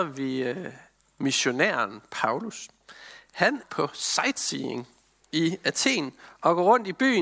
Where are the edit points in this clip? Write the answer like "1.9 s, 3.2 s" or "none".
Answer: 3.6 s